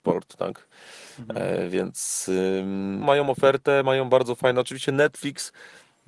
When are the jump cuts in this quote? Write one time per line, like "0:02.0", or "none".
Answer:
0:03.0